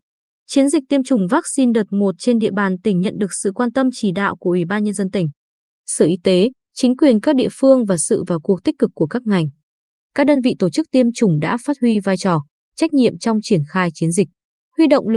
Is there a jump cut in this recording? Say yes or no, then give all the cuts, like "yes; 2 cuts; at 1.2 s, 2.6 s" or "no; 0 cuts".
no; 0 cuts